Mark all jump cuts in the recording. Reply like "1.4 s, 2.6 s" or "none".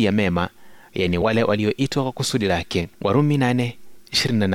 2.9 s